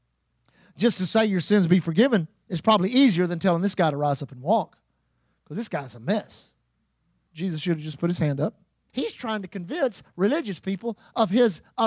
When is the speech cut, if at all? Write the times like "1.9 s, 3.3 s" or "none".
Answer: 7.3 s, 8.9 s